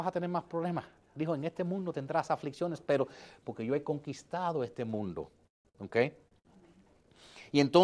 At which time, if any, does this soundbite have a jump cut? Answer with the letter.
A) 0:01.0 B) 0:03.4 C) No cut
B